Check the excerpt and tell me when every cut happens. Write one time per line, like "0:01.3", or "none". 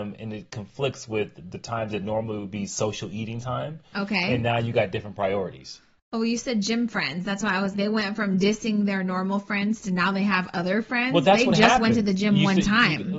0:07.7